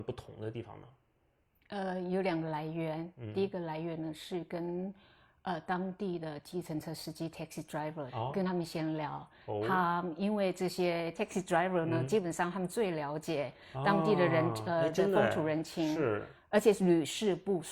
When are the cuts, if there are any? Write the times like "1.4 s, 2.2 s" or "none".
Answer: none